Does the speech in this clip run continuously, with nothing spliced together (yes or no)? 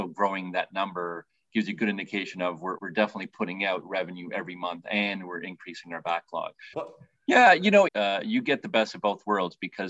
no